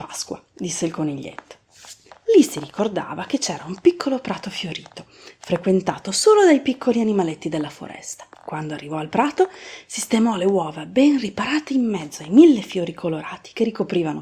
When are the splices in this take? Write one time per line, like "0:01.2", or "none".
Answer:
0:02.1
0:08.3